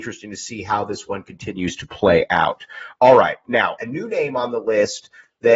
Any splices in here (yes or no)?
yes